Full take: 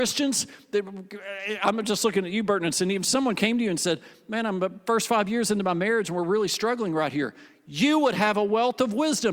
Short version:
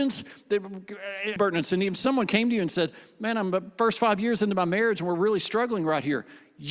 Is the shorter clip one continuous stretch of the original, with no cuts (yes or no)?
no